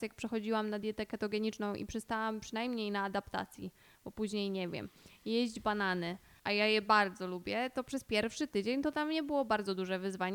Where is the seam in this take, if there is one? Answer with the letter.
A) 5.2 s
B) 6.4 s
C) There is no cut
B